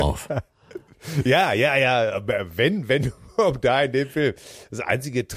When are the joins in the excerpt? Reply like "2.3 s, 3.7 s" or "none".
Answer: none